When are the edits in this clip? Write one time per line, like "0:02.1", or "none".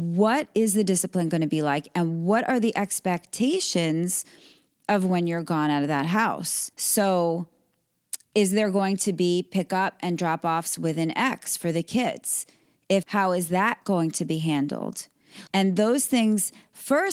0:06.7
0:13.0
0:15.5